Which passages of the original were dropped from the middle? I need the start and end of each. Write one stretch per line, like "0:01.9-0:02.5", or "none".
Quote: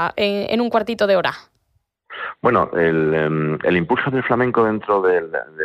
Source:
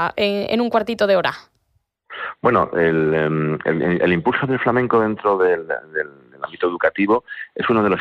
0:03.6-0:04.0